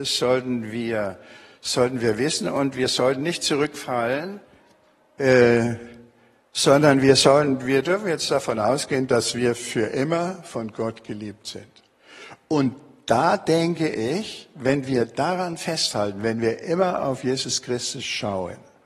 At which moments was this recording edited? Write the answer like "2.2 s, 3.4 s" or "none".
6.4 s